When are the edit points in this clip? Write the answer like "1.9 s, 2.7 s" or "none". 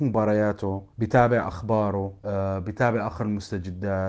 0.9 s, 2.2 s